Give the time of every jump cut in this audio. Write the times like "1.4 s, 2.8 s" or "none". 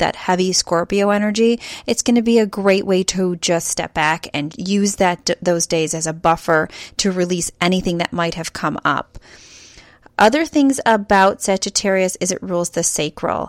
4.5 s